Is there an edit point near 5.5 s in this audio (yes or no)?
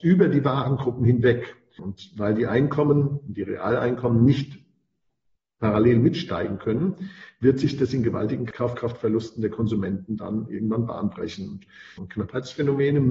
no